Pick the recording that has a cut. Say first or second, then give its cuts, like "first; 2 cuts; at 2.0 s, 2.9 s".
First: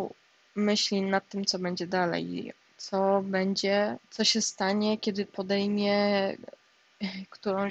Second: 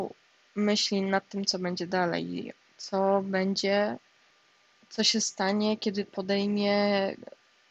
first; 1 cut; at 4.0 s